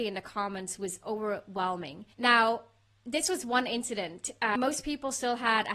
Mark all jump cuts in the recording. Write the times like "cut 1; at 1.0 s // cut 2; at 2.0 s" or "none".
cut 1; at 2.1 s